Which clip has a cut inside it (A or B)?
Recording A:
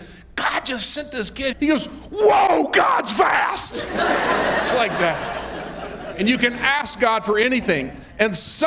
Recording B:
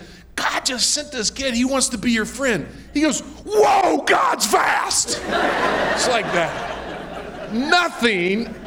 A